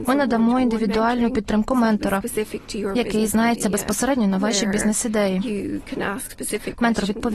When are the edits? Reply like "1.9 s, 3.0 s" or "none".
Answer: none